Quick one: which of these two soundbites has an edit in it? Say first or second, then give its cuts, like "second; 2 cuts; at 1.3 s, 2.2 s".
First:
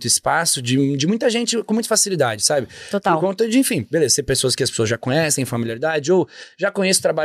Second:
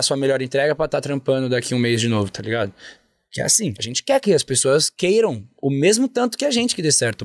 second; 1 cut; at 3.8 s